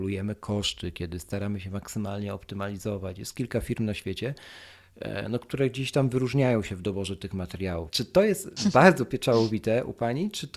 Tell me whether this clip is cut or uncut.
cut